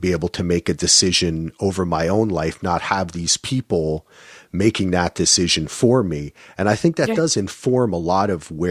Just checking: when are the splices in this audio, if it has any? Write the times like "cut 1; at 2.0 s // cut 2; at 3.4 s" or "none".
none